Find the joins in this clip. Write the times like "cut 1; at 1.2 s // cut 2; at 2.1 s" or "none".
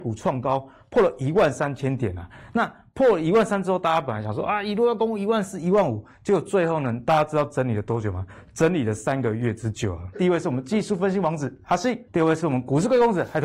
cut 1; at 10.1 s // cut 2; at 12.1 s